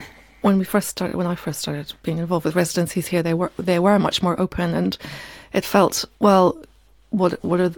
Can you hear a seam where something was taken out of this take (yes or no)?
no